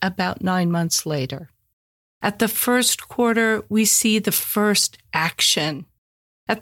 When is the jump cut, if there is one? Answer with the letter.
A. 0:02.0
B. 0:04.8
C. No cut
A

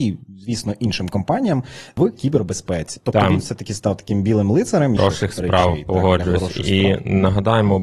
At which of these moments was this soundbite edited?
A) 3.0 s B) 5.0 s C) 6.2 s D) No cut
B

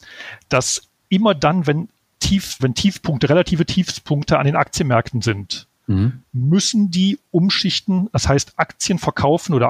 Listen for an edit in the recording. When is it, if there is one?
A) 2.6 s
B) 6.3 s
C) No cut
A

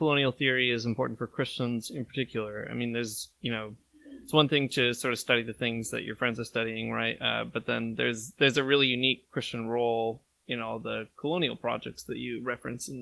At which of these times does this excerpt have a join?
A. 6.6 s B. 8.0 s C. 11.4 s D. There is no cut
D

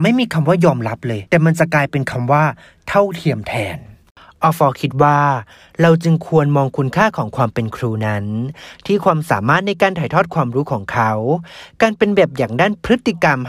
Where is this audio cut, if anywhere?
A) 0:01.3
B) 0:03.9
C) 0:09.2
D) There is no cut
A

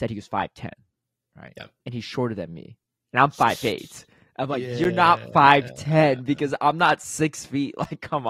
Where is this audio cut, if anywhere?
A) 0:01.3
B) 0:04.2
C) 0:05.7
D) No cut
D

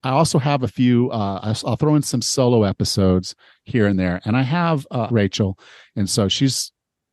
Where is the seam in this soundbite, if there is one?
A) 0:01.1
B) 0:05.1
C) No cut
B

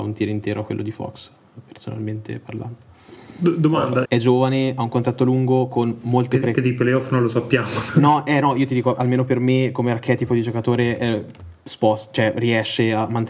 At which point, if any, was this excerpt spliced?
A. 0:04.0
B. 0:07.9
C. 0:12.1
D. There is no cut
A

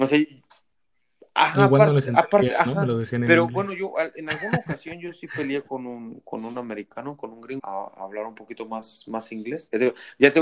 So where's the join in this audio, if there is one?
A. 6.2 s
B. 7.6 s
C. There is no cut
B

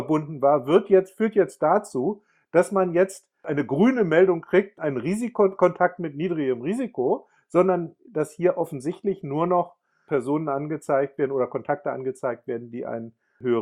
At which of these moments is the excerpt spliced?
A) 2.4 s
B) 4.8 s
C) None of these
B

